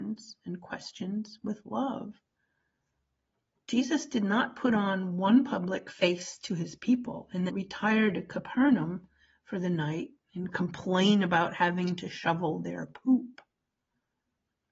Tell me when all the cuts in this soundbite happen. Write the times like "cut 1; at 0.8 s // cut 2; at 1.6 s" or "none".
cut 1; at 7.5 s